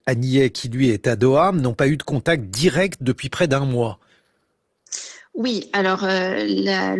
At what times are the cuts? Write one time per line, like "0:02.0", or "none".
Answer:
none